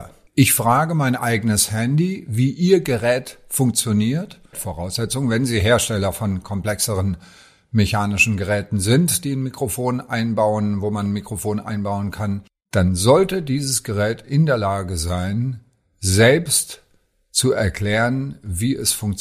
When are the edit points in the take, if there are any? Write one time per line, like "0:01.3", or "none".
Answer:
0:04.5